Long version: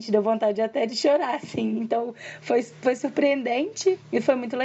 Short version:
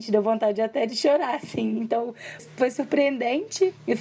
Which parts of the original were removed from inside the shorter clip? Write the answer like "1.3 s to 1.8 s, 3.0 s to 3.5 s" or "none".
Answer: 2.4 s to 2.6 s